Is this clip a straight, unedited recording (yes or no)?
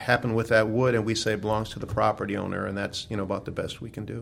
yes